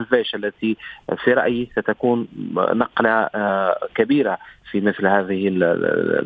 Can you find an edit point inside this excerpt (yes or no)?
no